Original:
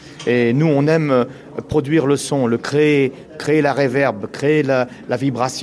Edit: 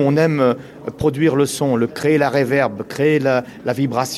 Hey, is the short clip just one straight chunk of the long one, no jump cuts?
no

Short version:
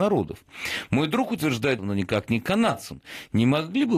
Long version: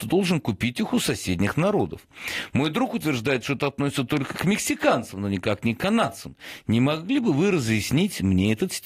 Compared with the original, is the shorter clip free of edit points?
no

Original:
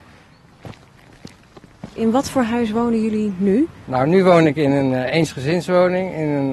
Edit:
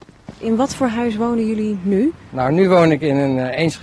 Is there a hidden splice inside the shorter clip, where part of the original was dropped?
no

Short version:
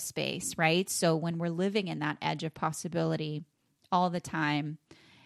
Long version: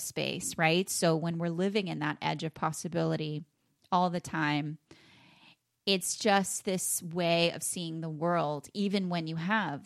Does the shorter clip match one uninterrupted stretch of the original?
yes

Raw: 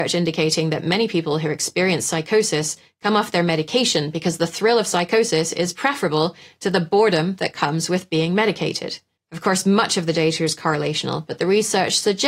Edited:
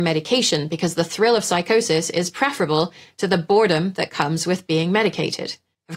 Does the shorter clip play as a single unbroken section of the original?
yes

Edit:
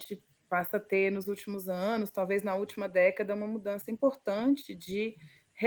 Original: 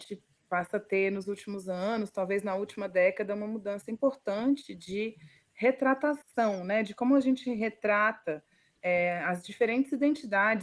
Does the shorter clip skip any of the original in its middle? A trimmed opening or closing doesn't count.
no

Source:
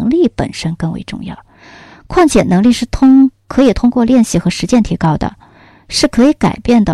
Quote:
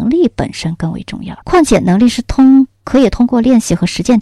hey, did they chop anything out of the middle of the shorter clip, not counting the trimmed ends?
yes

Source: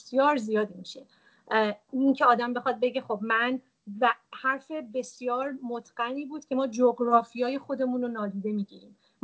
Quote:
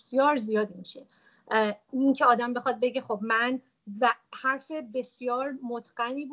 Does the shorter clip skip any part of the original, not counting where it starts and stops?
no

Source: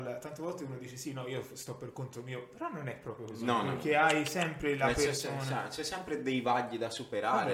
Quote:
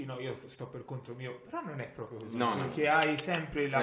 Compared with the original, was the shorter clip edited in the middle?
no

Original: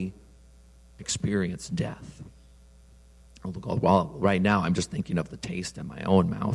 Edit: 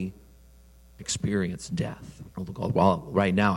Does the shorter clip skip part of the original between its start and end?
yes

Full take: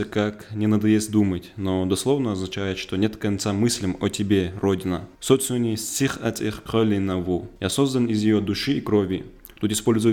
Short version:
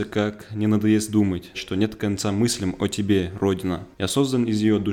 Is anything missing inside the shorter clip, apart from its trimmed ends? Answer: yes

